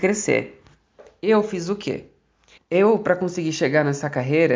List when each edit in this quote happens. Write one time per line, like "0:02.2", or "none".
0:02.6